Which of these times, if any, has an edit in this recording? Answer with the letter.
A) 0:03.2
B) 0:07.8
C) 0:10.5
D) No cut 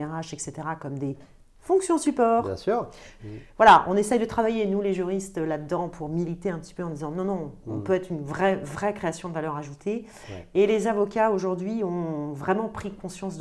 A